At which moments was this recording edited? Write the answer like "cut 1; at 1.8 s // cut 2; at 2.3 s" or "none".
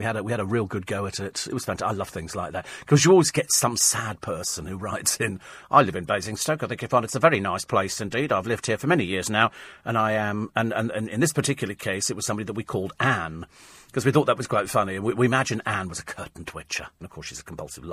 cut 1; at 17.0 s

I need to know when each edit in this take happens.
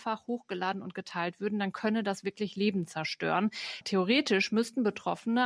cut 1; at 3.8 s

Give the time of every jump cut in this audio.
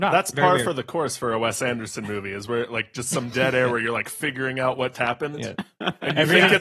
cut 1; at 4.9 s

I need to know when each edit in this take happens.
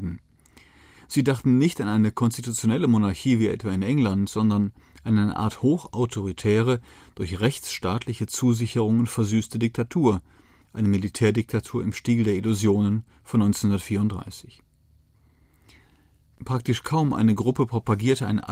cut 1; at 10.6 s

